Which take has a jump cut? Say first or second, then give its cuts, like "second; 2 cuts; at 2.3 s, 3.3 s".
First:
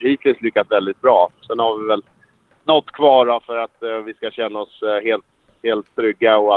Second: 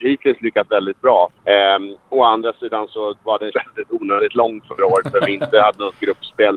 second; 2 cuts; at 1.4 s, 3.5 s